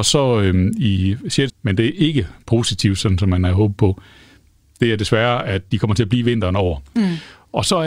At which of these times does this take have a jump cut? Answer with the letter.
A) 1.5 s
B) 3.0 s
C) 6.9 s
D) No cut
A